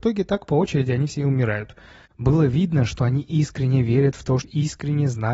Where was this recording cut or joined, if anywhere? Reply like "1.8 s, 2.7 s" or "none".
2.0 s, 4.4 s